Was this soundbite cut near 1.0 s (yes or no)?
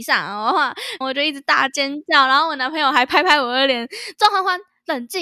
yes